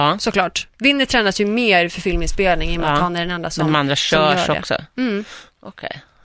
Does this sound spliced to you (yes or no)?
no